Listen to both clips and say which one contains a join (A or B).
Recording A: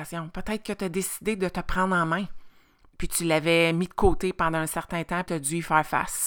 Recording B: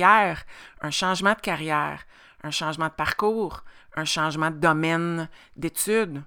A